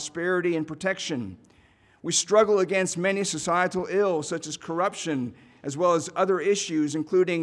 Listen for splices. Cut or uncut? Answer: uncut